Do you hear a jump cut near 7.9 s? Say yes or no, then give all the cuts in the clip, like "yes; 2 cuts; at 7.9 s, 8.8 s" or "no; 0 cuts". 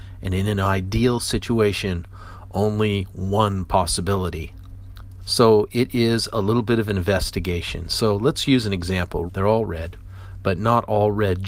no; 2 cuts; at 5.2 s, 9.3 s